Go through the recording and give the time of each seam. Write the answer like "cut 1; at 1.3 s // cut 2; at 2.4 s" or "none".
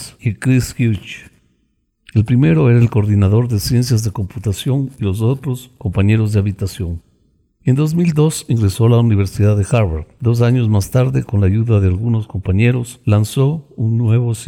none